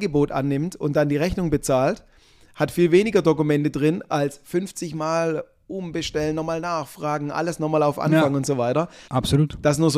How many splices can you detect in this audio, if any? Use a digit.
1